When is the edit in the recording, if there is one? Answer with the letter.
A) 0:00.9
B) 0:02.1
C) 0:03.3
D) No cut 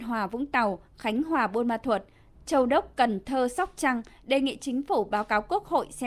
D